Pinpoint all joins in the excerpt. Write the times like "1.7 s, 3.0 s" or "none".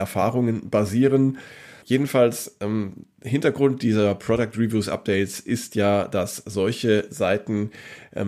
1.8 s